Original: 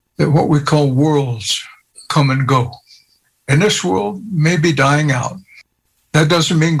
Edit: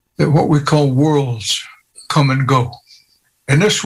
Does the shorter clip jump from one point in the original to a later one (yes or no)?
no